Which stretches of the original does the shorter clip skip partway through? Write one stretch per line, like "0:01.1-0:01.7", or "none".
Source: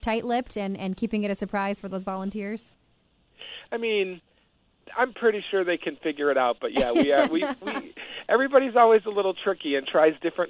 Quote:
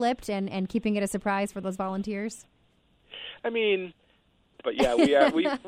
0:04.9-0:06.6